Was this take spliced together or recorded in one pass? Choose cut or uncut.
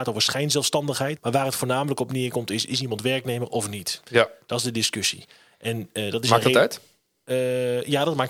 cut